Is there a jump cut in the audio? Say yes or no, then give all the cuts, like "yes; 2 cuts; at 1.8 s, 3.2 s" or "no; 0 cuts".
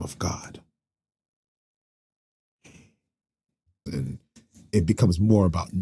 yes; 1 cut; at 3.9 s